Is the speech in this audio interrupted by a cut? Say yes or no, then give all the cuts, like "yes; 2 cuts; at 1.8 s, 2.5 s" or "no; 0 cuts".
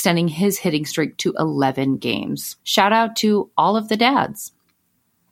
yes; 1 cut; at 2.6 s